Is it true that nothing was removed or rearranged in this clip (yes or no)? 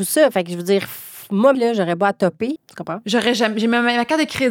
no